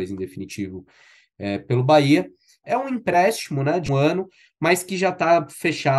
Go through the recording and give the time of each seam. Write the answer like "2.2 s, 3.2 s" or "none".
2.6 s, 3.9 s